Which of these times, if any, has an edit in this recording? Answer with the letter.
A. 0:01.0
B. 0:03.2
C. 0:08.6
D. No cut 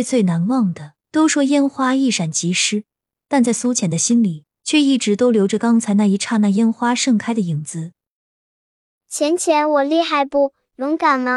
A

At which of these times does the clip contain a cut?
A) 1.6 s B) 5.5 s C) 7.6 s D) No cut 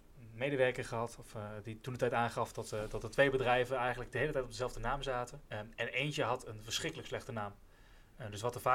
B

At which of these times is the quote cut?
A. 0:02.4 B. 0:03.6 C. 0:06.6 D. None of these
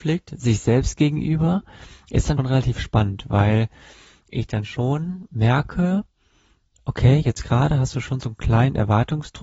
A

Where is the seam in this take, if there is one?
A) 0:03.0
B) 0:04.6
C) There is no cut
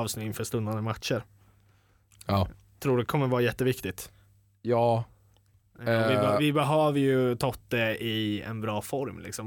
A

